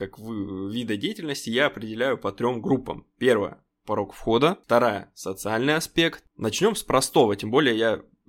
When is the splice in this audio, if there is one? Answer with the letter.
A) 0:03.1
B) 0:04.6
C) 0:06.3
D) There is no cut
C